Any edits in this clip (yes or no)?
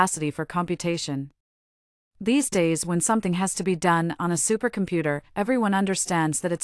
no